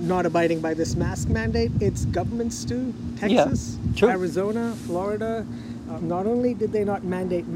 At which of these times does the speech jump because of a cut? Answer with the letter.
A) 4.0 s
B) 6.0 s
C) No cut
B